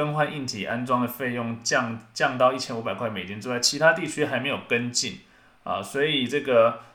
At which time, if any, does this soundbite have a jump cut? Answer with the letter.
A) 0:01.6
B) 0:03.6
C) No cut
C